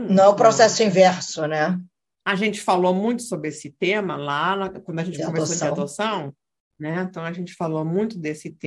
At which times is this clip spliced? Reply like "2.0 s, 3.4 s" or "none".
2.2 s